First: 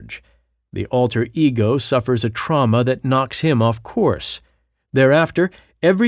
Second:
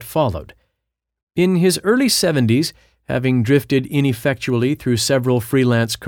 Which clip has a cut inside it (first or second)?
second